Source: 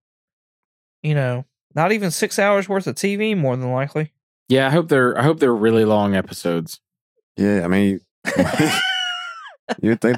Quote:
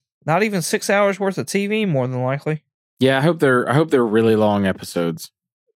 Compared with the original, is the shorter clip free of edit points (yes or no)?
yes